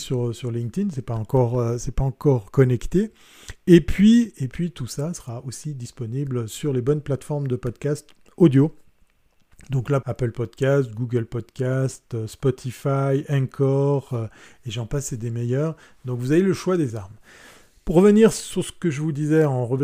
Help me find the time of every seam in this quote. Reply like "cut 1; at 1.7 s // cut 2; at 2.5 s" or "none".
cut 1; at 10.0 s

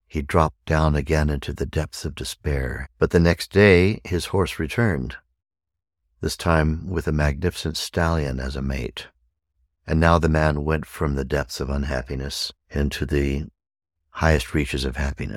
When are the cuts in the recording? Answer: cut 1; at 2.8 s // cut 2; at 9.6 s // cut 3; at 12.6 s

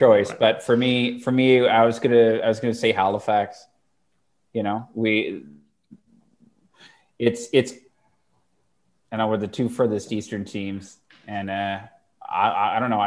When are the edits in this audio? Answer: none

